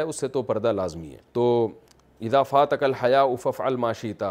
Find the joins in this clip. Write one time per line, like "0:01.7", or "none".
0:01.3